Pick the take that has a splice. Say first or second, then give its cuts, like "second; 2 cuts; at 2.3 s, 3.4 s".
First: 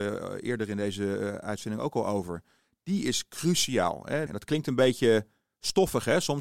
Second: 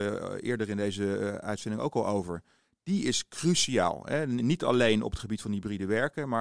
first; 1 cut; at 4.3 s